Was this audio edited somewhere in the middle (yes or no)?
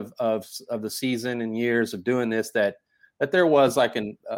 no